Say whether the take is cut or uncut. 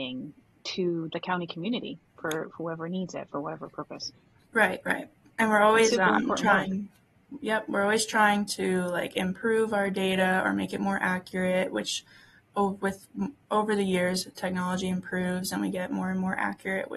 cut